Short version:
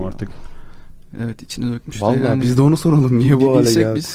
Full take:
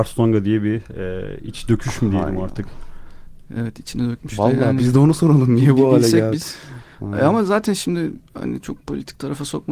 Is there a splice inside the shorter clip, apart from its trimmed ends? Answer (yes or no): no